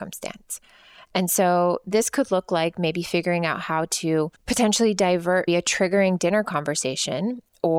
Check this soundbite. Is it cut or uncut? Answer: cut